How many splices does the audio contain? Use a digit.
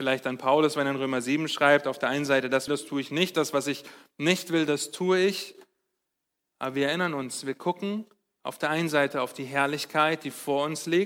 1